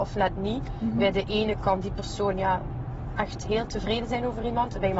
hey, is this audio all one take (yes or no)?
no